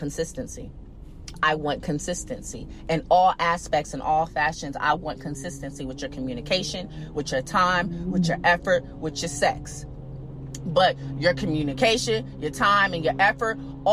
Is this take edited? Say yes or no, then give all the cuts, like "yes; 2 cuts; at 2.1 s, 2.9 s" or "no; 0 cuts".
no; 0 cuts